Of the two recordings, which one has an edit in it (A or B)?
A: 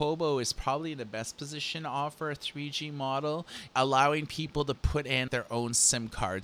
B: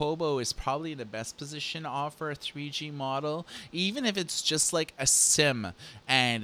A